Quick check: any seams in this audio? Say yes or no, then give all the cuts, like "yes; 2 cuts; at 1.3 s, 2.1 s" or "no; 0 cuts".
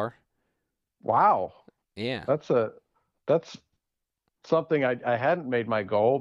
no; 0 cuts